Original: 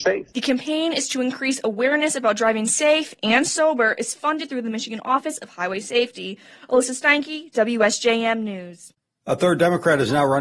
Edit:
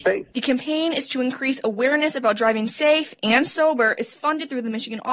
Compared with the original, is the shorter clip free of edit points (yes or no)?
yes